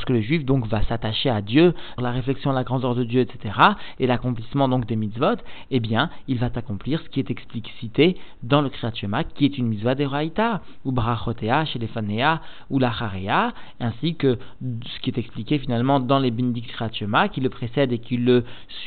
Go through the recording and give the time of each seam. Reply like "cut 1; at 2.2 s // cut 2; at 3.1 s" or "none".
cut 1; at 2.0 s // cut 2; at 16.7 s